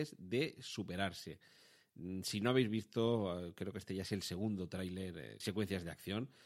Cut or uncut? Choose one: cut